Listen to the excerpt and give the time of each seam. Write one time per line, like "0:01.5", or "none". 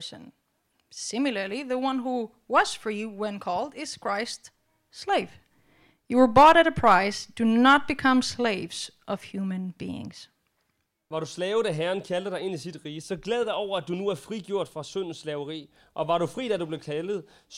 none

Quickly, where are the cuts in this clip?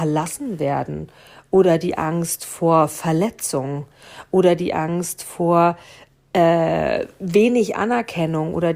none

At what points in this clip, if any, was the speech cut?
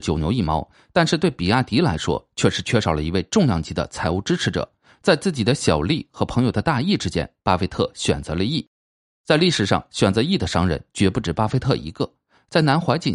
none

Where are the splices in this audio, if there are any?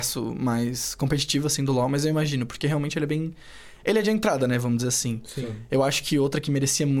none

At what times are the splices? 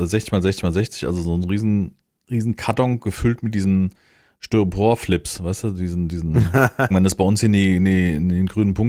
0:06.9

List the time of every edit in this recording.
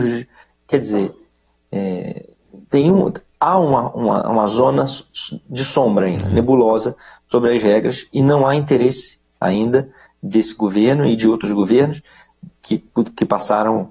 none

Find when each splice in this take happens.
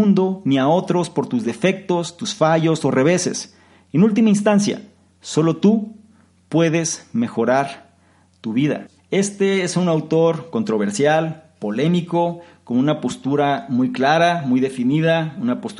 0:09.0

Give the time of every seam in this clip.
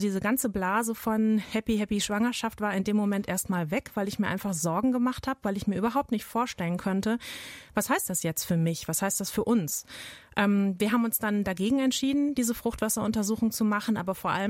none

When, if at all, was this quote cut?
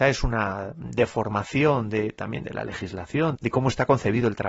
0:03.3

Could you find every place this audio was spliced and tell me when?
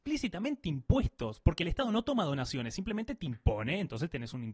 none

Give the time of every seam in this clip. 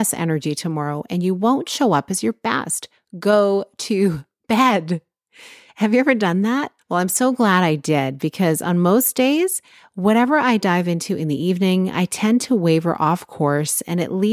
0:06.8

